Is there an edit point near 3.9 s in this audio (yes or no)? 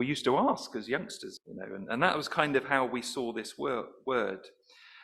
no